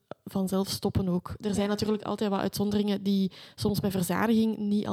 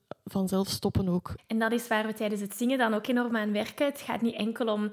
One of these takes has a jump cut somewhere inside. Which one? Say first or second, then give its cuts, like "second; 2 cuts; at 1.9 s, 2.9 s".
second; 1 cut; at 1.4 s